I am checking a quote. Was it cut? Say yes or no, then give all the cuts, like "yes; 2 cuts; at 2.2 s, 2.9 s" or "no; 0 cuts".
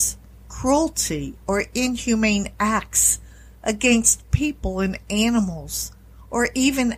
no; 0 cuts